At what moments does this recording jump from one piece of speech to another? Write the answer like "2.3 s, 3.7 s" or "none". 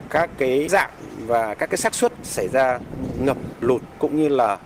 3.6 s